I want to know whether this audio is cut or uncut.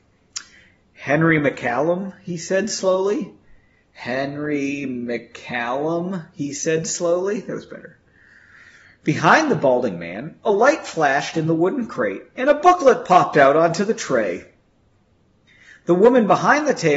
uncut